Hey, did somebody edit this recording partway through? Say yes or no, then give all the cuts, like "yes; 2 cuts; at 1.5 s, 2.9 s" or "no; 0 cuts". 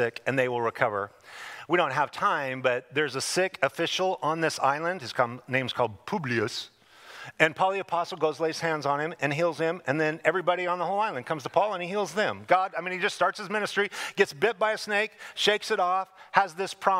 no; 0 cuts